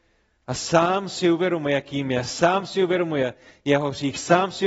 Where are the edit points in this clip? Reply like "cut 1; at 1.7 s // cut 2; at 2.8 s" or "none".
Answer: none